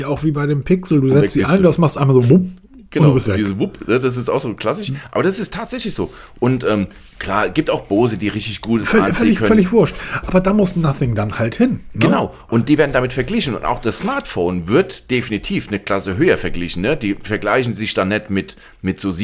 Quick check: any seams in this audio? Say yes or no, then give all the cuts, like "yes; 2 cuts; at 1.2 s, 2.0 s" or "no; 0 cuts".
no; 0 cuts